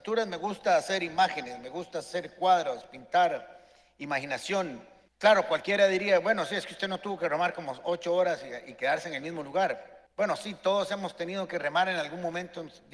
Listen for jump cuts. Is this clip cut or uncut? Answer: cut